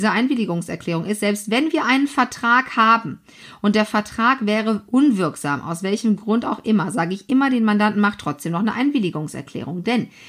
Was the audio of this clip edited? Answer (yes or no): no